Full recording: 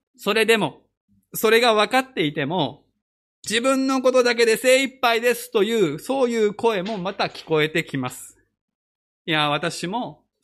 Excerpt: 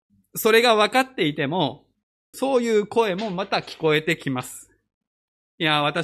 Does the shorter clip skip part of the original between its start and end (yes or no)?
yes